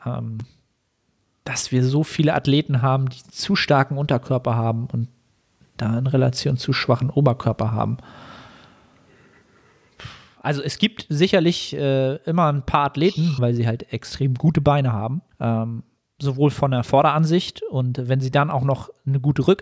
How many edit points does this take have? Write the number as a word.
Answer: three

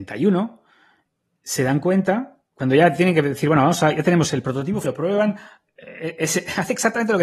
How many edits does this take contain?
one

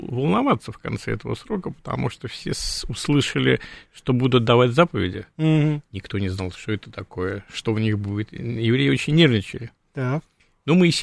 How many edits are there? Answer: zero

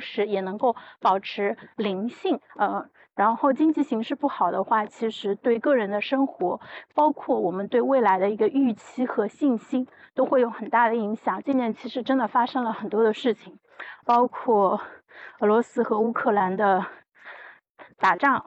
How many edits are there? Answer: three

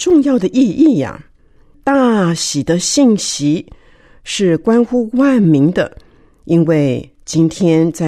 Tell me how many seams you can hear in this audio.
one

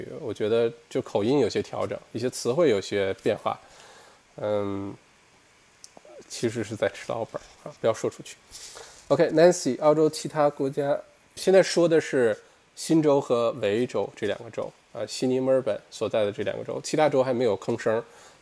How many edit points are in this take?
one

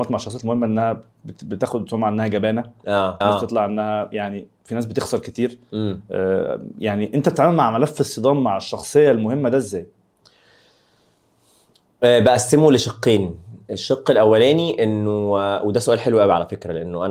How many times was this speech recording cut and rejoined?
one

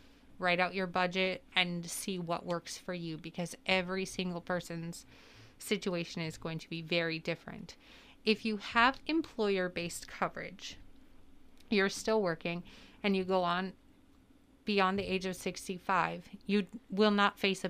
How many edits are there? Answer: one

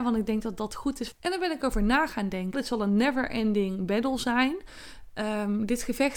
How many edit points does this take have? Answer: two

